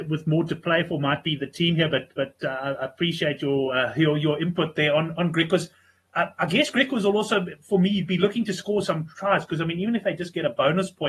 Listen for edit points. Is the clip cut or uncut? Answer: uncut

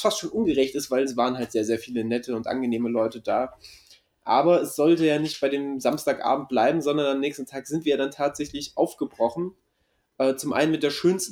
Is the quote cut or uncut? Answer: uncut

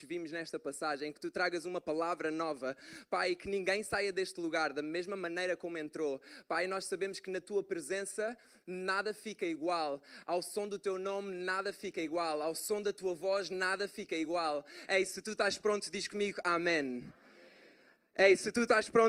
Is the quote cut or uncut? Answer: cut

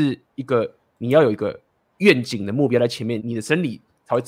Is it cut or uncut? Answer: cut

